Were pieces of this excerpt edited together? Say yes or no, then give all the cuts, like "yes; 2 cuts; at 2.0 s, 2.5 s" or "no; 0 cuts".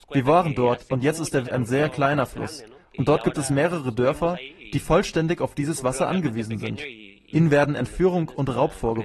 yes; 2 cuts; at 1.4 s, 7.3 s